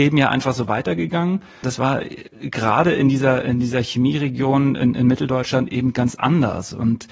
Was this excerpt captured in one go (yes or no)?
no